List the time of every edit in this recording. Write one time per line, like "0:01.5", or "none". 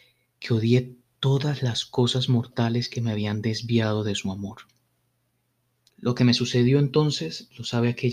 0:05.9